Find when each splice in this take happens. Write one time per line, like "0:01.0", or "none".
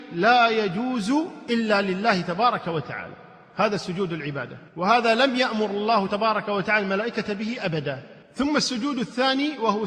0:04.7
0:08.2